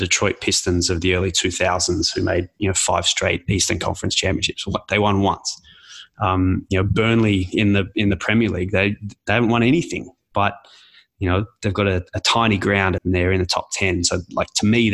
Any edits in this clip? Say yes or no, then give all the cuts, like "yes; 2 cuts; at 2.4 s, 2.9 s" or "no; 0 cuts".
yes; 1 cut; at 13.0 s